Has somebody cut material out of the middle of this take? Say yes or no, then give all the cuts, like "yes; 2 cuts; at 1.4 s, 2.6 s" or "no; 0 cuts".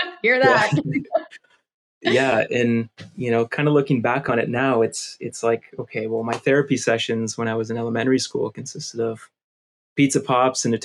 no; 0 cuts